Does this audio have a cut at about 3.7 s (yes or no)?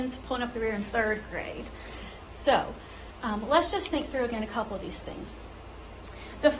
no